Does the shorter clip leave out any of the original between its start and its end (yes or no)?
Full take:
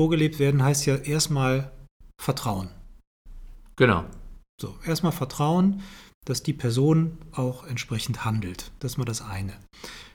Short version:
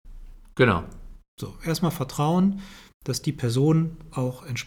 no